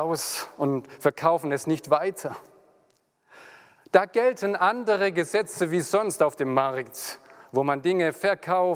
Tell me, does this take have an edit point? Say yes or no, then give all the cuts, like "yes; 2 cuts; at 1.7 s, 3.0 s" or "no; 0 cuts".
yes; 1 cut; at 3.8 s